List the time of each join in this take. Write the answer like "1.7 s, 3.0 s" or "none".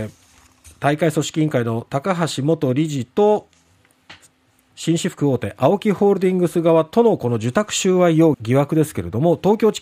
8.3 s